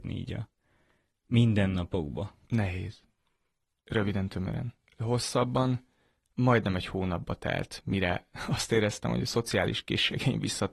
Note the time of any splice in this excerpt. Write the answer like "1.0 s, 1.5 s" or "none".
2.4 s